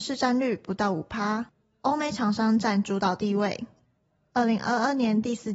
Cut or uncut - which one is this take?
uncut